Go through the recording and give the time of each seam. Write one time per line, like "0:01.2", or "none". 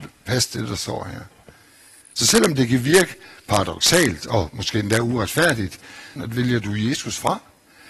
0:02.0
0:06.2